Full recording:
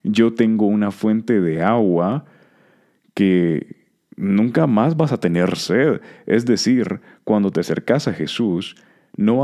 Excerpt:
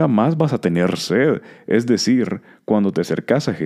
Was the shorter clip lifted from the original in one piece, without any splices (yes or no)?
yes